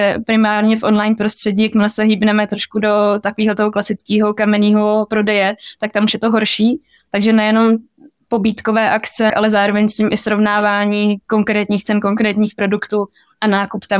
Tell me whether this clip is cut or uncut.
cut